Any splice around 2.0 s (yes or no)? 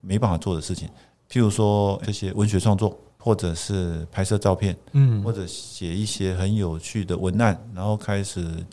yes